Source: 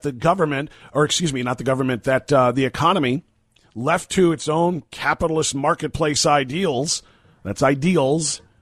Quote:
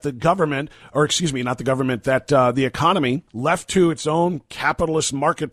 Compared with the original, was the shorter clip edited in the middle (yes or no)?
yes